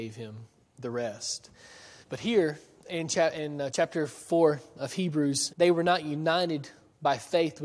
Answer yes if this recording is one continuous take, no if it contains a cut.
no